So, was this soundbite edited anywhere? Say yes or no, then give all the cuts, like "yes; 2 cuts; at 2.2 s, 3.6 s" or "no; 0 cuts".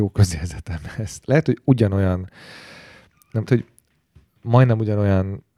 yes; 2 cuts; at 1.2 s, 3.5 s